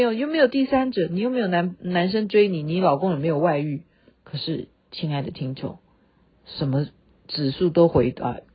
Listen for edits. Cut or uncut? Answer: cut